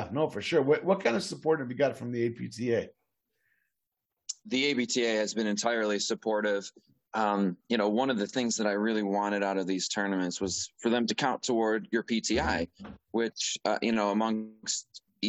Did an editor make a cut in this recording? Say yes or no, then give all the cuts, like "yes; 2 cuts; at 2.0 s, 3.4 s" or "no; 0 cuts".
no; 0 cuts